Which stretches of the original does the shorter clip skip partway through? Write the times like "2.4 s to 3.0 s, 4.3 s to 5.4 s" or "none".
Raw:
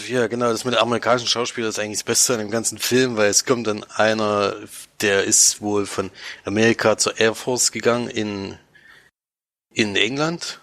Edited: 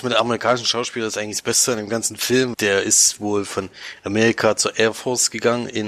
3.2 s to 5.0 s